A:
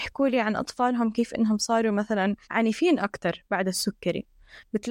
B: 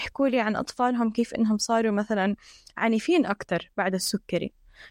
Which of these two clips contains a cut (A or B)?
A